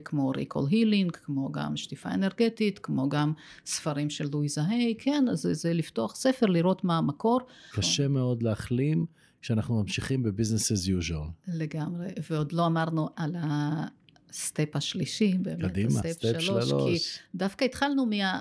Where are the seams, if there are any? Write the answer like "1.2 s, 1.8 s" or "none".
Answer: 7.7 s, 16.0 s